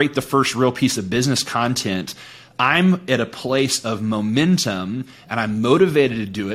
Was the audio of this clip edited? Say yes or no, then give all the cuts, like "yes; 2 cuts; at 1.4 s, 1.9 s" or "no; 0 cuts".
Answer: no; 0 cuts